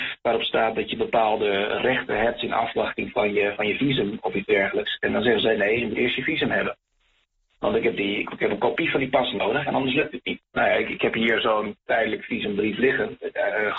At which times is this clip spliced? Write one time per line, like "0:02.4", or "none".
0:10.4